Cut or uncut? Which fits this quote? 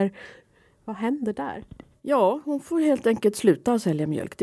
uncut